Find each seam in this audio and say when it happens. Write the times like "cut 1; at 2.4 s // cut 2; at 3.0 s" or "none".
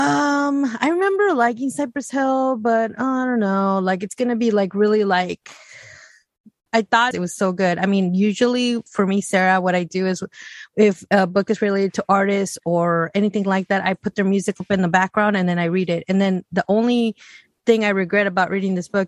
cut 1; at 7.1 s // cut 2; at 12.6 s